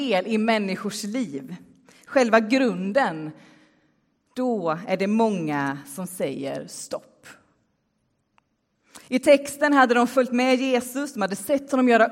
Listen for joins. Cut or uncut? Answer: uncut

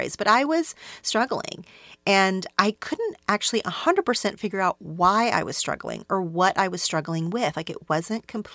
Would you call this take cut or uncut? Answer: uncut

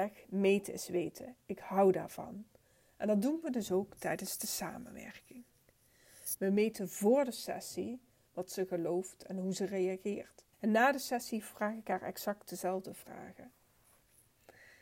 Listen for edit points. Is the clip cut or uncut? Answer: cut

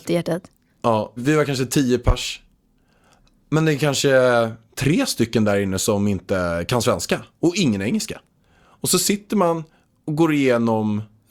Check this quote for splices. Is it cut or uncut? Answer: cut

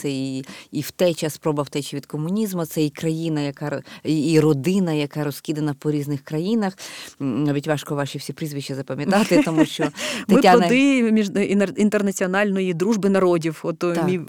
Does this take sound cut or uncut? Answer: uncut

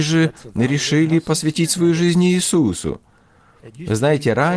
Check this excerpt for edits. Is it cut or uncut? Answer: uncut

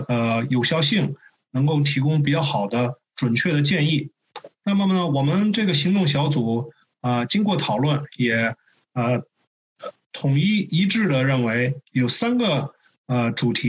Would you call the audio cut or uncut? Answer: uncut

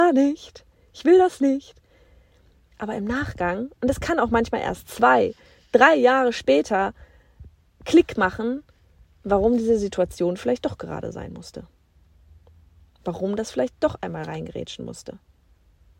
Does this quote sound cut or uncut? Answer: uncut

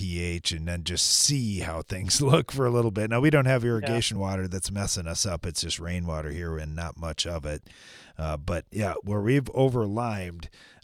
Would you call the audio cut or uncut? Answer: uncut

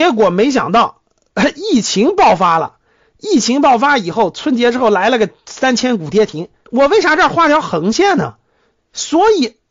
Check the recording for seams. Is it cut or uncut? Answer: cut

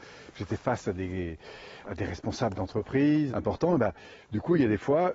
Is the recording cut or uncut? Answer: cut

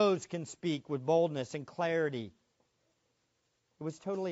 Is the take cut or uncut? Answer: uncut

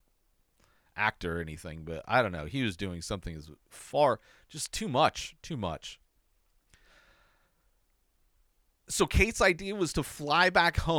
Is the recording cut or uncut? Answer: uncut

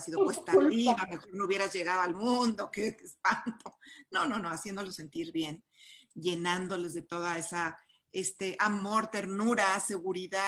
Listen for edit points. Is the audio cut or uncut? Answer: uncut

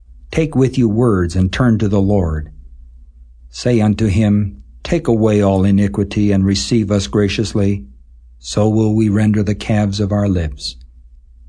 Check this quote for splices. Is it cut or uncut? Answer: uncut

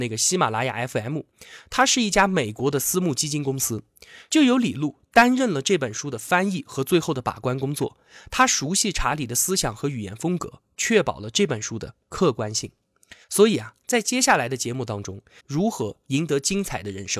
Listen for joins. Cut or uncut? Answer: cut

